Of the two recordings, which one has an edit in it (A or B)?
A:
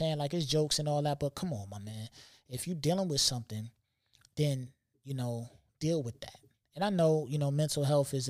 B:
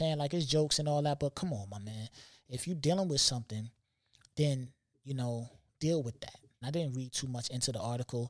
B